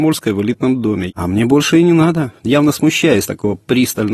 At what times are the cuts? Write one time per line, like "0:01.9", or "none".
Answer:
0:01.1
0:02.4